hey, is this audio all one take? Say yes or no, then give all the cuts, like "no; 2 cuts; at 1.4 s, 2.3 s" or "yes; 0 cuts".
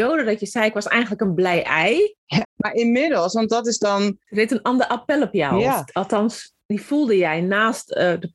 no; 2 cuts; at 2.4 s, 4.2 s